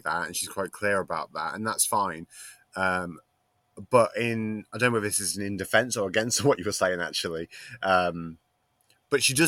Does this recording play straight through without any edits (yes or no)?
yes